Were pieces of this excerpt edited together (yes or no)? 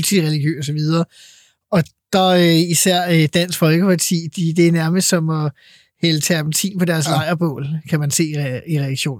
no